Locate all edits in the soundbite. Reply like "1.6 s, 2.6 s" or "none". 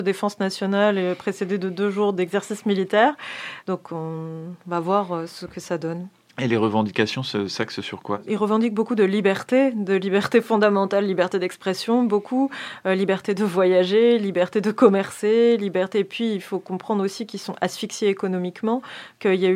3.6 s